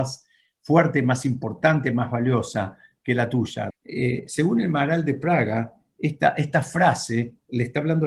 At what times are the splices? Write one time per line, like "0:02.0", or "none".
0:03.7